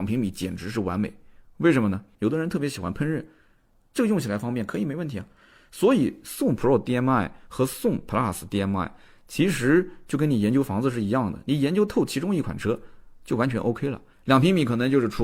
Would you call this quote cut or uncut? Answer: cut